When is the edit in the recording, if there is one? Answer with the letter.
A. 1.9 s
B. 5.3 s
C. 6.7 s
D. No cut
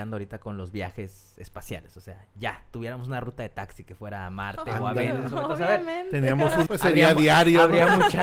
C